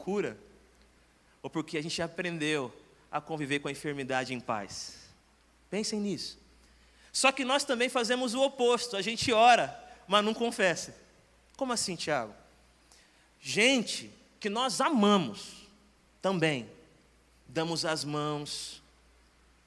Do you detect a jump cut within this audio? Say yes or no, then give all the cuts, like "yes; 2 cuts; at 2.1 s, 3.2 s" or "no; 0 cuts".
no; 0 cuts